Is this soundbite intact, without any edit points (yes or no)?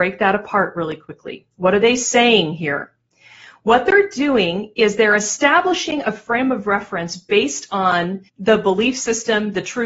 no